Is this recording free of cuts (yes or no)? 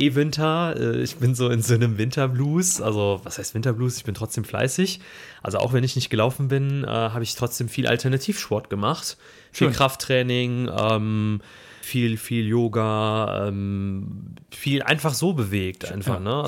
no